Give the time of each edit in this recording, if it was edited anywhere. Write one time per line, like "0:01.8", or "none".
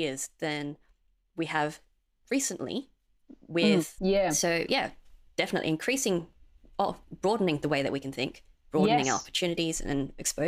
0:04.0

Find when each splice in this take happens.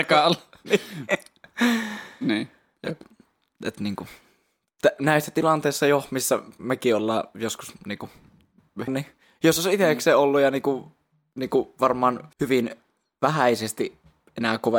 0:08.9
0:12.3

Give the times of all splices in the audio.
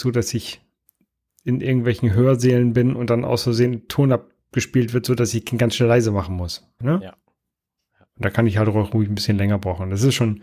0:06.8

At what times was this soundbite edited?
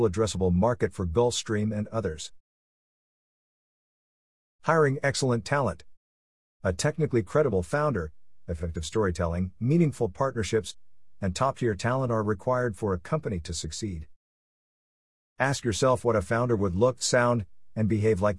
none

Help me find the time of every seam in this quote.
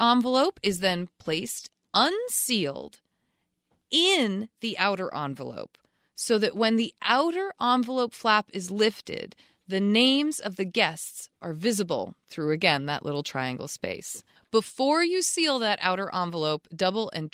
none

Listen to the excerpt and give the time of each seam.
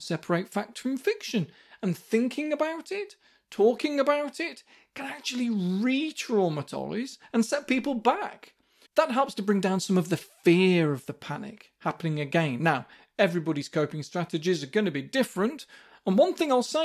0:08.8

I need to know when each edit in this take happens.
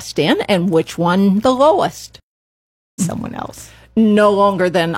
0:03.0

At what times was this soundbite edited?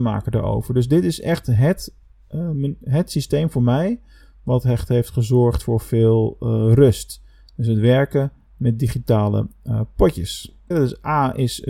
0:10.7

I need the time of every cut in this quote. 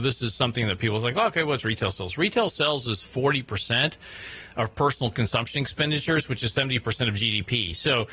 none

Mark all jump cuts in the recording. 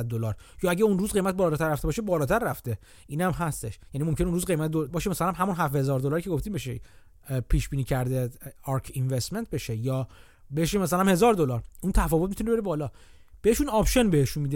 0:04.9

